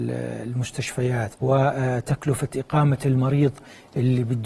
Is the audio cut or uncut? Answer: cut